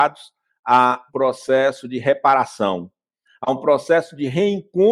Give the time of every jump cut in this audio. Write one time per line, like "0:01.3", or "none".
0:01.1
0:03.3